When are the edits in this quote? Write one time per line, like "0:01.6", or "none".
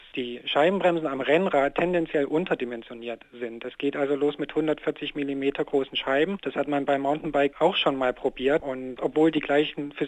0:08.6